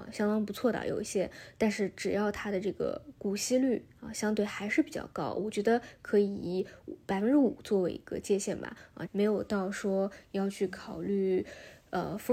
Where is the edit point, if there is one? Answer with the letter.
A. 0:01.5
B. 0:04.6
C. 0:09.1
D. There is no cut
C